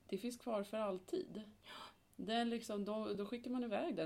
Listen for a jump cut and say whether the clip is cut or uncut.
uncut